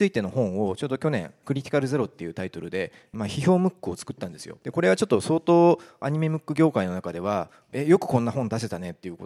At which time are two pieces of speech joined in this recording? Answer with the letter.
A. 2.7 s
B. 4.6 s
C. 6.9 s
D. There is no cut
B